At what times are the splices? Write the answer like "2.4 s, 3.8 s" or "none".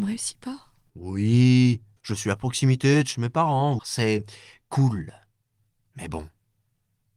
2.0 s, 3.8 s

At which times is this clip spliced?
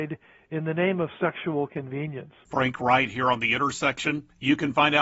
none

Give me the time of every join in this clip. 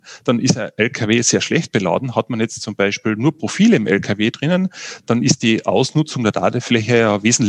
none

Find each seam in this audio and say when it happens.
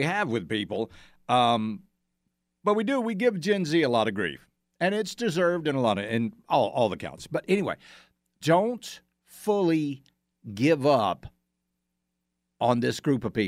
8.4 s

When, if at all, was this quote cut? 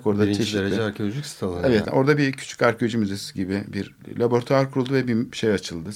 1.8 s

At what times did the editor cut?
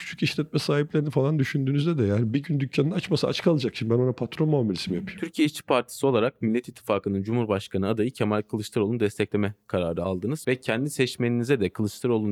10.4 s

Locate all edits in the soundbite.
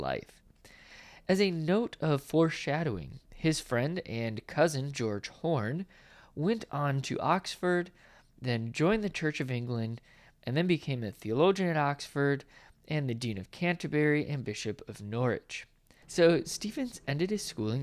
16.0 s

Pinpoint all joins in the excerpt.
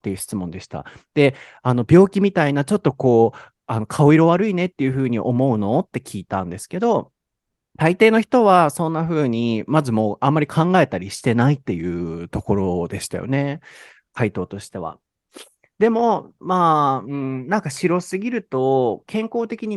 none

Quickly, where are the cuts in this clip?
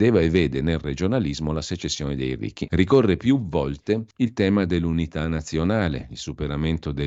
2.7 s, 4.1 s

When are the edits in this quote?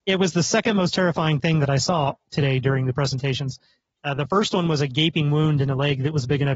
none

